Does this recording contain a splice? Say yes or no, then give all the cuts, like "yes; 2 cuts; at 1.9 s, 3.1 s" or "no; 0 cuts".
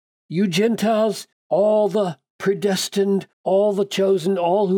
yes; 2 cuts; at 1.3 s, 3.3 s